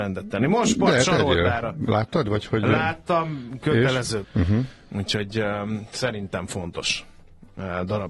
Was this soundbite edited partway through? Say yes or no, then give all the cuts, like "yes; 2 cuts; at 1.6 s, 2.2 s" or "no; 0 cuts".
yes; 1 cut; at 4.2 s